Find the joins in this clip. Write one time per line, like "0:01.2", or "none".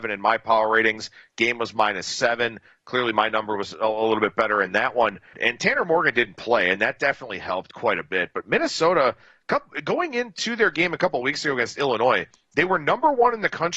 0:05.3